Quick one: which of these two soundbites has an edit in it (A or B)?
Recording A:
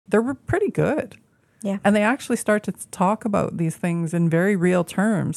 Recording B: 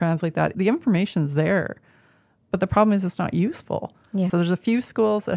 B